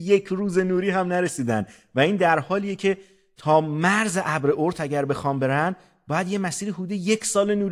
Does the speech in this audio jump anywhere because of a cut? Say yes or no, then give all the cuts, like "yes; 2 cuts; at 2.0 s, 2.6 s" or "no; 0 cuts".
no; 0 cuts